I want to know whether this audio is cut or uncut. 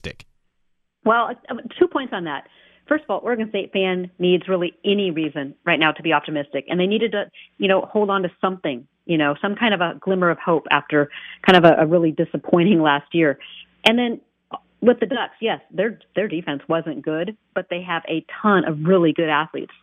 uncut